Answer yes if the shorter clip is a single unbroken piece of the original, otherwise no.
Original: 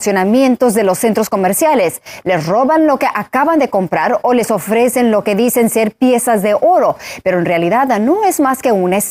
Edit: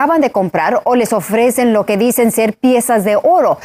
yes